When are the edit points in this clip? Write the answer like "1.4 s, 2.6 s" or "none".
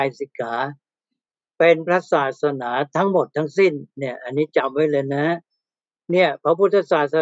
none